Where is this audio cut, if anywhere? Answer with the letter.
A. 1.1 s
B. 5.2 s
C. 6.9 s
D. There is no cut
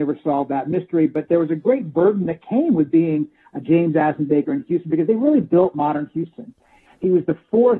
C